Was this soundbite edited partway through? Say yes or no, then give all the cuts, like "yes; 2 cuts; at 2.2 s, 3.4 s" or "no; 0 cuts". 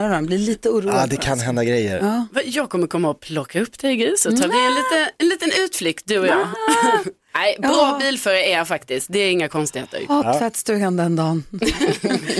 no; 0 cuts